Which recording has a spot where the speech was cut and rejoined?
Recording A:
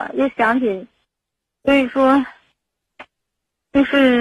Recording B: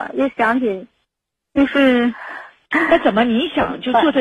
B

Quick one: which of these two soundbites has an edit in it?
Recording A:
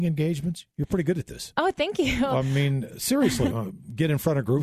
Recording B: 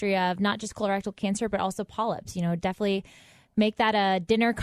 A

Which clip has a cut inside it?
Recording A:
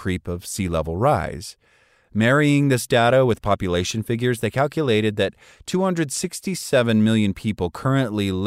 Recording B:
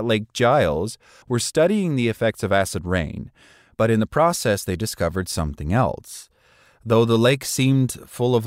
B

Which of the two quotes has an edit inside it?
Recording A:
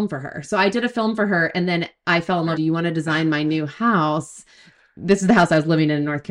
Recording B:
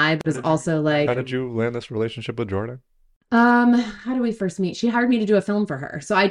A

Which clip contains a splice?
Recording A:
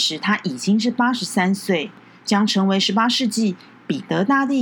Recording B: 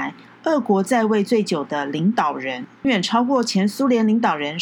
B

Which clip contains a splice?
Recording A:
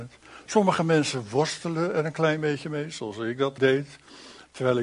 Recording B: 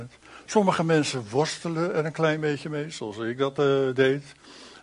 A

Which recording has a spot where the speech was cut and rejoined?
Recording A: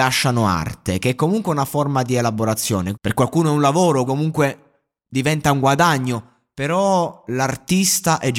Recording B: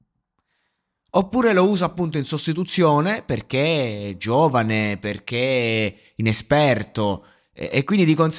A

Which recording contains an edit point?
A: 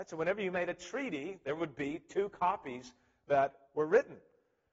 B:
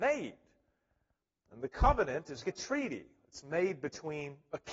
B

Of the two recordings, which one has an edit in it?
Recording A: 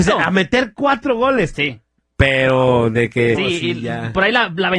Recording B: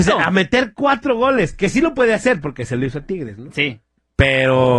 A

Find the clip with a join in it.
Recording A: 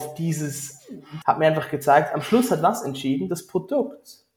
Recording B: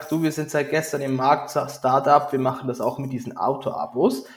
A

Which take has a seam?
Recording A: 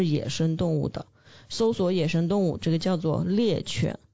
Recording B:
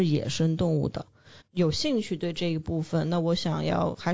B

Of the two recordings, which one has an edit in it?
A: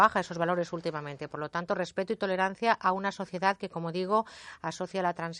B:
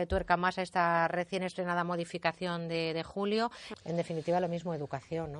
B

